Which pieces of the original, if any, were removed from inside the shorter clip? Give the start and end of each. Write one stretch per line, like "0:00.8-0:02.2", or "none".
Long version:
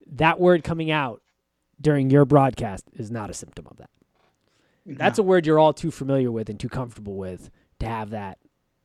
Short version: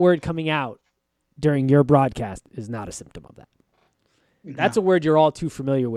none